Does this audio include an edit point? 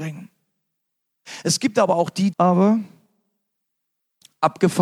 yes; 1 cut; at 2.3 s

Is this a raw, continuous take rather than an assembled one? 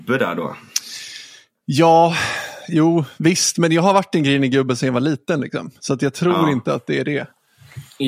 yes; 0 cuts

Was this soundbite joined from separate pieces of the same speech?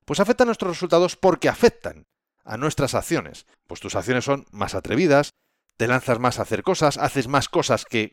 yes; 1 cut; at 3.5 s

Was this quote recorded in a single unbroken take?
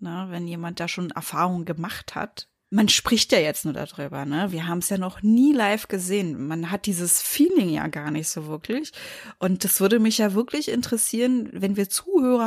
yes; 0 cuts

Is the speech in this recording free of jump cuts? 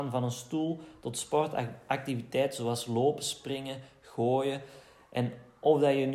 yes; 0 cuts

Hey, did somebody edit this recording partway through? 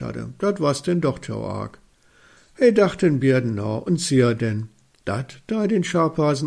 yes; 1 cut; at 5.0 s

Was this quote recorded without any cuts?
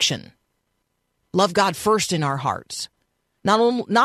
yes; 0 cuts

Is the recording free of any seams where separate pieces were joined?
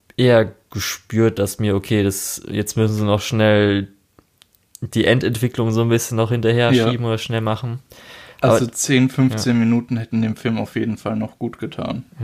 yes; 0 cuts

